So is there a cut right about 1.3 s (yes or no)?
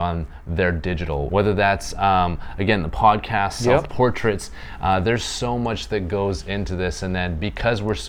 yes